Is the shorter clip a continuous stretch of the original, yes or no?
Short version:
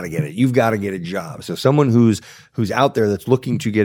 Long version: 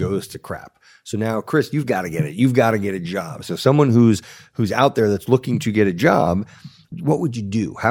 yes